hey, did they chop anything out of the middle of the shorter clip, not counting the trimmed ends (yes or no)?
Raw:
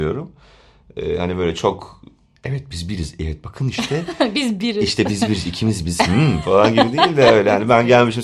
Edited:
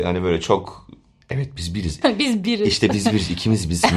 yes